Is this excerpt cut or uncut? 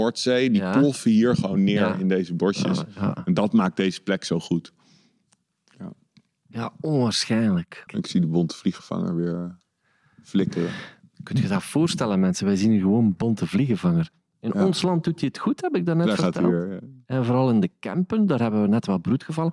cut